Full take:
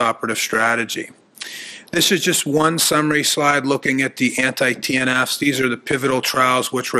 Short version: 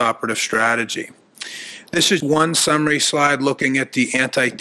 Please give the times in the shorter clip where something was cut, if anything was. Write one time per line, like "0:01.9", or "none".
0:02.2